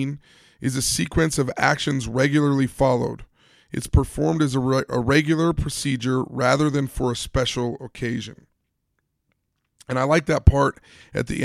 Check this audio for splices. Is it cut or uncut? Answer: uncut